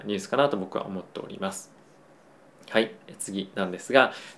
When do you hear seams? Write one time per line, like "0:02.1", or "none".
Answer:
none